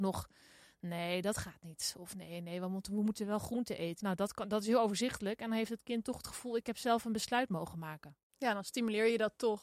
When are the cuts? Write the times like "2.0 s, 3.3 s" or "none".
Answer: 4.0 s